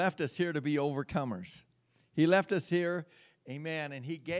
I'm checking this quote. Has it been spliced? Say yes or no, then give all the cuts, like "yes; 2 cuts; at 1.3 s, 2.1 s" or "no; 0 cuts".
no; 0 cuts